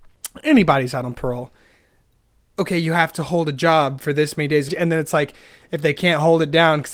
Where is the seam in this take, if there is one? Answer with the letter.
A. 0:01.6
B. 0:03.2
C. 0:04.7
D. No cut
C